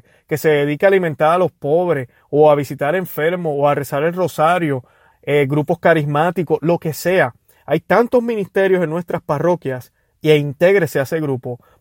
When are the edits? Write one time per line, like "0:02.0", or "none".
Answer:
0:05.1

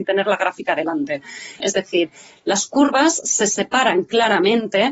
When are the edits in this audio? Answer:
0:01.6

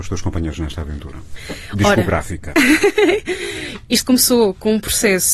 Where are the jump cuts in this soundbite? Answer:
none

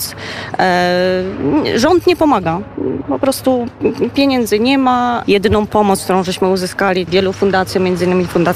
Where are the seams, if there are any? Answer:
0:05.2
0:07.1

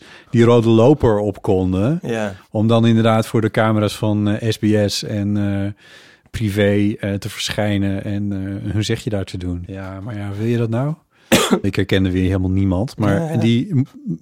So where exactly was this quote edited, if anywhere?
0:09.7
0:11.6

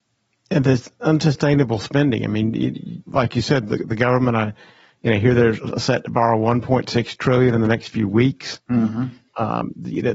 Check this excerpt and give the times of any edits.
0:03.0

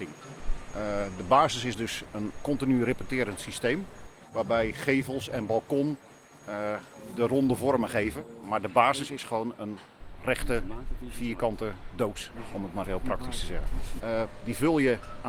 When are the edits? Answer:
0:02.3
0:12.8
0:14.0

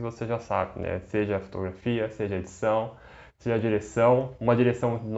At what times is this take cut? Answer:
none

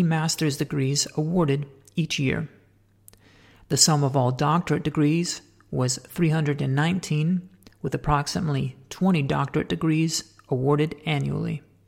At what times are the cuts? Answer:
none

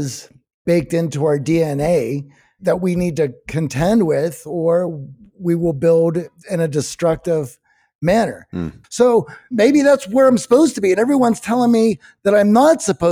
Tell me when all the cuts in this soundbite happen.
0:08.8

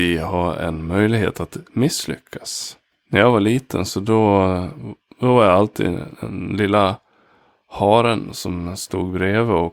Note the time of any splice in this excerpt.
none

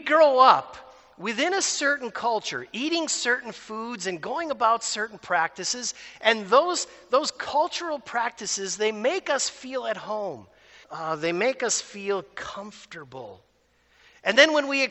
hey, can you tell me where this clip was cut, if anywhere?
0:10.8

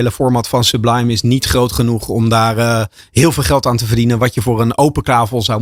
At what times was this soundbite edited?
none

